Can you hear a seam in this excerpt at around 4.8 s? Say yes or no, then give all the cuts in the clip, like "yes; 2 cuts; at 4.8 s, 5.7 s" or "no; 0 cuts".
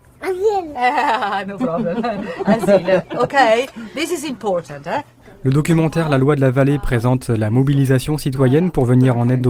no; 0 cuts